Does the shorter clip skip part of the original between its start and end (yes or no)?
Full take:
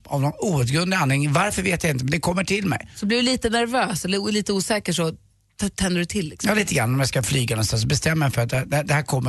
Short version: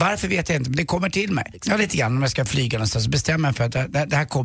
yes